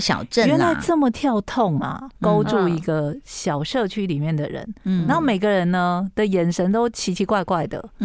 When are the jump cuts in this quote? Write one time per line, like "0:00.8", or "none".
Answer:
0:02.1